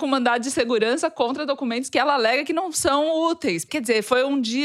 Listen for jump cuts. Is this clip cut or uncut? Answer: uncut